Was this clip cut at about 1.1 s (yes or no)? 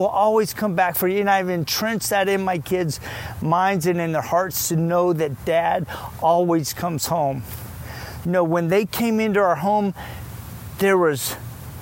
no